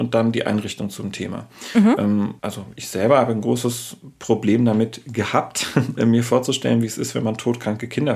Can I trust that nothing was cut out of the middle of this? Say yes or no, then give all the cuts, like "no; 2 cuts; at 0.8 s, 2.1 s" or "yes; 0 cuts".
no; 2 cuts; at 2.4 s, 6.0 s